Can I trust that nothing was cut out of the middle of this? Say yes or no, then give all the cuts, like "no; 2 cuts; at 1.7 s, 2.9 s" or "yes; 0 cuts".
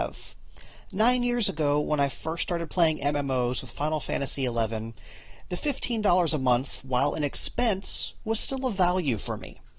yes; 0 cuts